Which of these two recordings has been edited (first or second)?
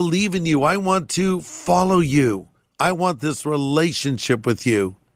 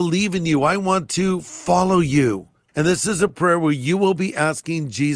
second